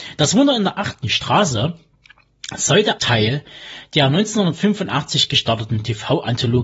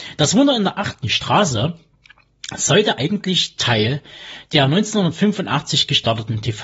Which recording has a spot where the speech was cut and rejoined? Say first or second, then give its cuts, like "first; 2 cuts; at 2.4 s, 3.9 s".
first; 1 cut; at 3.0 s